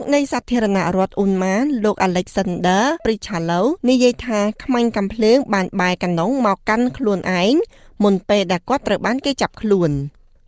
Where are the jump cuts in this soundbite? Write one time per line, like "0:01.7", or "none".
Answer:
0:03.8